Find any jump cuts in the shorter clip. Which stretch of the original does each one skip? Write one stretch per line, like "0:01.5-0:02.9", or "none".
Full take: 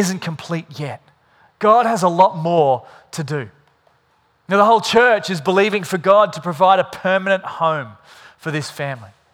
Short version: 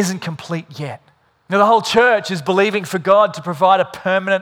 0:01.3-0:04.3